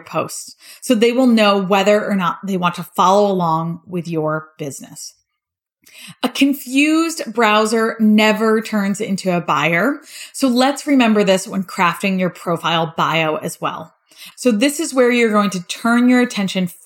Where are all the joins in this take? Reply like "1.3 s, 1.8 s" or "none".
14.3 s